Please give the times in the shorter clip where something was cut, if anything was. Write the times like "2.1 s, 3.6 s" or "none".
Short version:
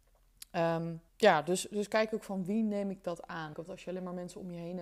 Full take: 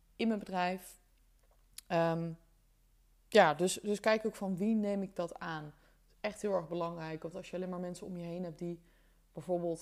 1.1 s, 3.5 s